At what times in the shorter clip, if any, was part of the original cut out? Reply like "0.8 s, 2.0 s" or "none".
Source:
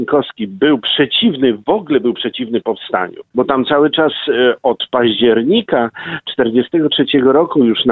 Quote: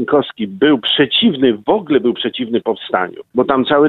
none